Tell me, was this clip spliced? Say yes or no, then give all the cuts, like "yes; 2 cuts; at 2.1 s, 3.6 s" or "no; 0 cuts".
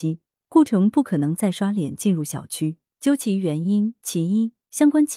yes; 1 cut; at 2.9 s